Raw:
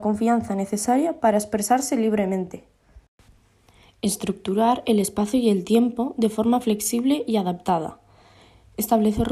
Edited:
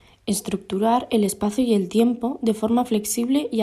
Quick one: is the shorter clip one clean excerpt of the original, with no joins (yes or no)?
yes